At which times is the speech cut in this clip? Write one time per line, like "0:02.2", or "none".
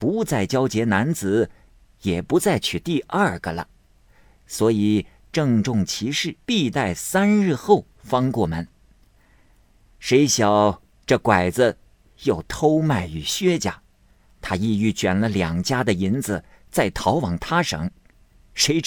0:06.4